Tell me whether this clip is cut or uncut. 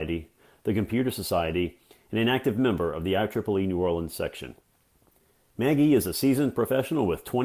uncut